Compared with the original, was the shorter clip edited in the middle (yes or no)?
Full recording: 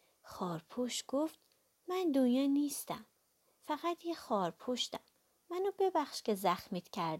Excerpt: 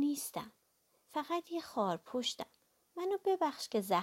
no